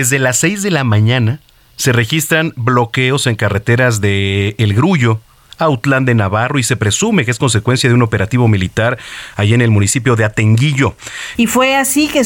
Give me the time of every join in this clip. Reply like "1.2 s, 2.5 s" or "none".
11.3 s